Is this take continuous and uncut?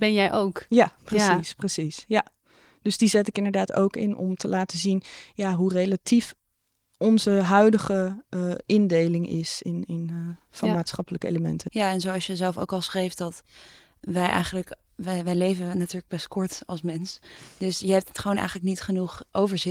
yes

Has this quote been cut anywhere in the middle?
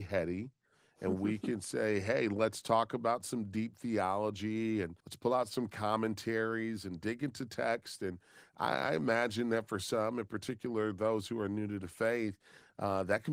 yes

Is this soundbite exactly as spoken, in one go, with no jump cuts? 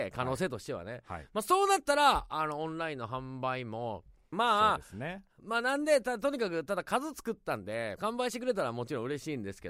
no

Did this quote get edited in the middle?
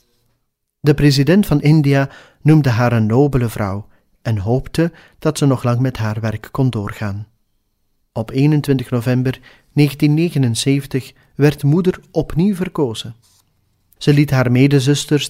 yes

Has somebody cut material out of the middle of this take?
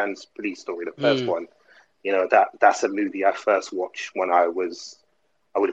no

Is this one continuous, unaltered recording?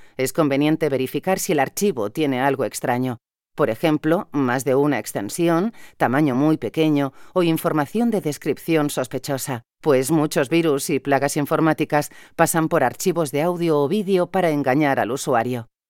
yes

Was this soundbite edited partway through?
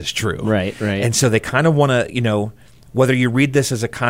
no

